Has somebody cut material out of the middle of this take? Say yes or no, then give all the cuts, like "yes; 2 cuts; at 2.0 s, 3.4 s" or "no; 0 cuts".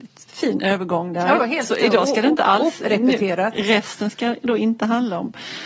no; 0 cuts